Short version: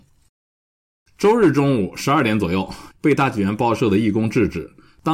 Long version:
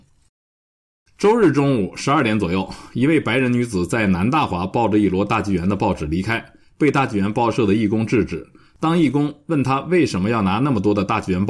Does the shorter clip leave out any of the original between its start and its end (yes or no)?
yes